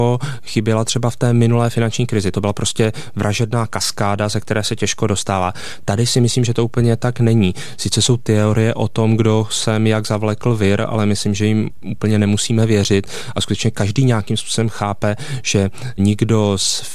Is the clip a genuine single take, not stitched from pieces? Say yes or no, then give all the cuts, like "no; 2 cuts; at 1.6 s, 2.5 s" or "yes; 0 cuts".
no; 1 cut; at 2.3 s